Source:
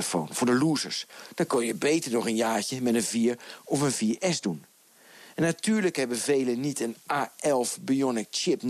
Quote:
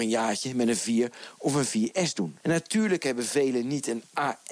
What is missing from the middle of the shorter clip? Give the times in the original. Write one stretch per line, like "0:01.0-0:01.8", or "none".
0:04.7-0:05.3